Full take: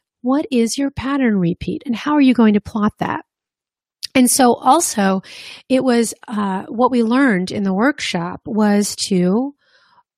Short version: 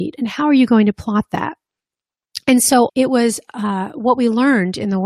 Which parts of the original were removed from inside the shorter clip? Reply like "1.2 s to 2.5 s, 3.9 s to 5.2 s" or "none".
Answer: 4.6 s to 5.6 s